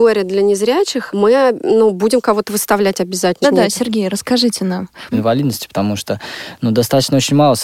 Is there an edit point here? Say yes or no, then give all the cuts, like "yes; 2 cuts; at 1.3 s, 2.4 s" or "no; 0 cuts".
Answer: yes; 3 cuts; at 1.1 s, 3.4 s, 5.1 s